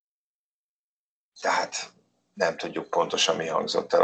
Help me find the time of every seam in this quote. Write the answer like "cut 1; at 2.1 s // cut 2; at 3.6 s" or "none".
none